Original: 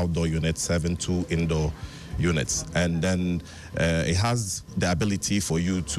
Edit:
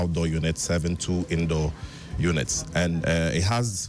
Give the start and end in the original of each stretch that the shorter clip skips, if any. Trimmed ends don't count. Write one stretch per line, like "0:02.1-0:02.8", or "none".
0:03.0-0:03.7